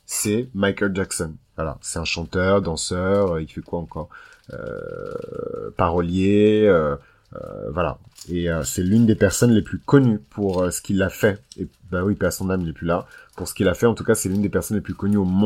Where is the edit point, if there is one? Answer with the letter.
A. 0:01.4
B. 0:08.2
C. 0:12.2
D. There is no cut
D